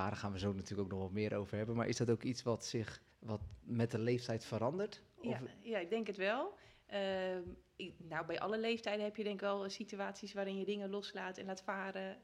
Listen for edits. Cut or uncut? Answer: cut